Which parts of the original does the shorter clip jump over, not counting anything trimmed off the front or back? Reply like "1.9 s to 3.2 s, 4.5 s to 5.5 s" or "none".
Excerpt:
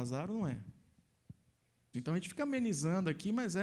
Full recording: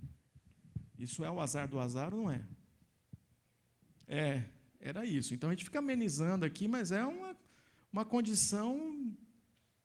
3.8 s to 5.3 s